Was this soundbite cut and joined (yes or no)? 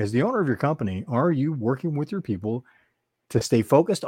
no